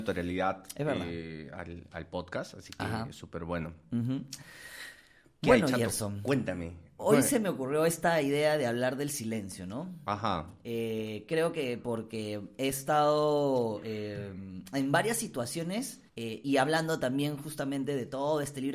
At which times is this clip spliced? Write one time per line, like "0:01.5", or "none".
0:16.1